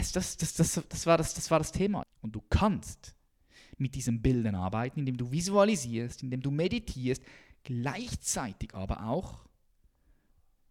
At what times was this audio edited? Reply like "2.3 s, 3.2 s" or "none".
2.0 s